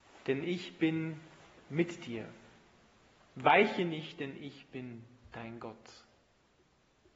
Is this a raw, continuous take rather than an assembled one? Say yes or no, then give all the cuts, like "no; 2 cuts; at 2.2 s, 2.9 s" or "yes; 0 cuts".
yes; 0 cuts